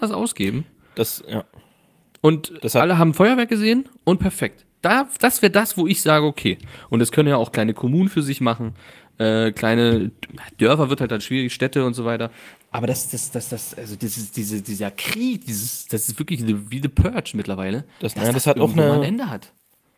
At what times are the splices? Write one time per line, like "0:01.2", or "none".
none